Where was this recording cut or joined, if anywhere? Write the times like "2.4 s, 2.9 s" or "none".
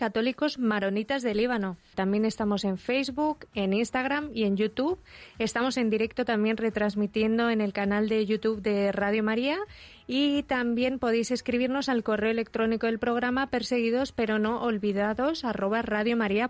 1.9 s

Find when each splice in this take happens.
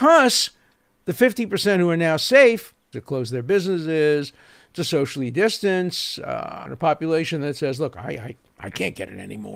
2.9 s, 6.7 s

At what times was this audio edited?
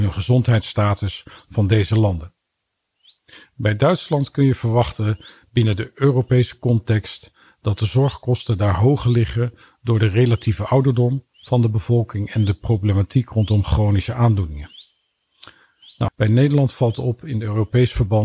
16.1 s

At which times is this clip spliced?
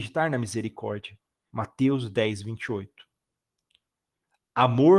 1.5 s

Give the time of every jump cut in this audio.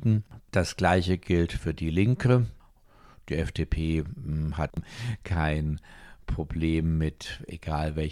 none

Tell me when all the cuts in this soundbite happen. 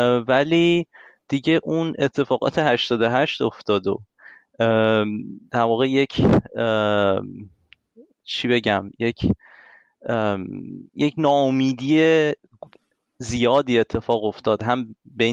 10.9 s

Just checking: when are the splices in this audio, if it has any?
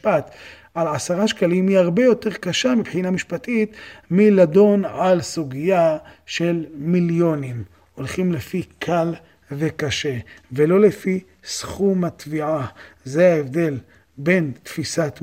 none

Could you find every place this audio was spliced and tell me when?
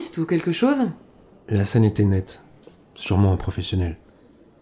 none

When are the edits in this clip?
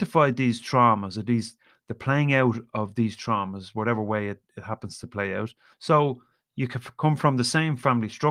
5.7 s

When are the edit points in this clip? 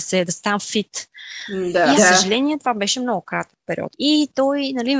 2.0 s, 3.9 s

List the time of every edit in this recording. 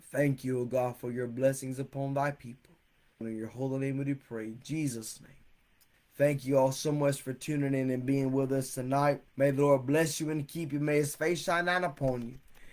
3.2 s, 5.9 s, 9.3 s

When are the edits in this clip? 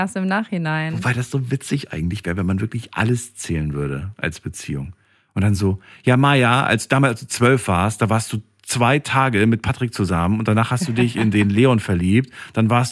none

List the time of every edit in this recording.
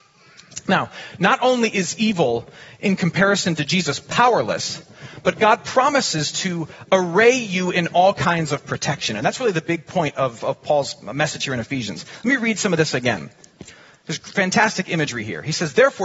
none

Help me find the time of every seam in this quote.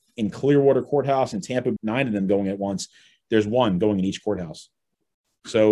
1.8 s

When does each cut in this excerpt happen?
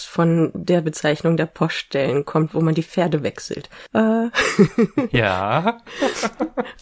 3.9 s

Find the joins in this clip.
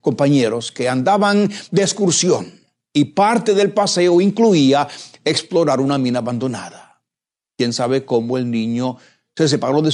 none

